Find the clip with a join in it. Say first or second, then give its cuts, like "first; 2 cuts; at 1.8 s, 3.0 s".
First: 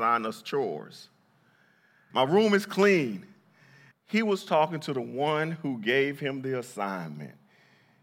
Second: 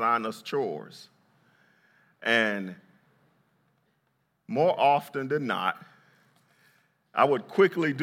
first; 2 cuts; at 2.1 s, 3.9 s